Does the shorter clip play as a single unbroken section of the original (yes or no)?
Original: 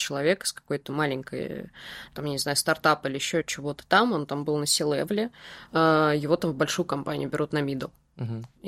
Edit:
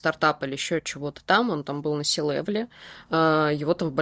yes